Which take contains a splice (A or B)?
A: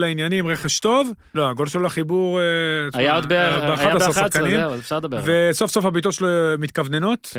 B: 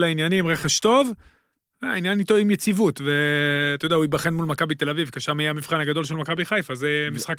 A